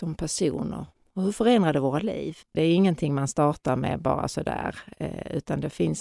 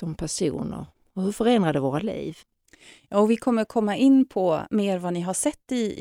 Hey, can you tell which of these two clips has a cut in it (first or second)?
first